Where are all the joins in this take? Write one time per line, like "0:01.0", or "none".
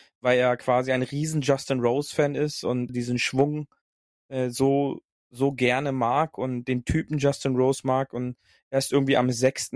0:02.9